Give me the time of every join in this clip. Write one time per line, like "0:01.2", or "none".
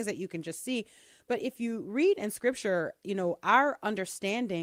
none